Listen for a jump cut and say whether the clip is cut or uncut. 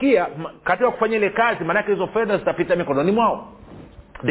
uncut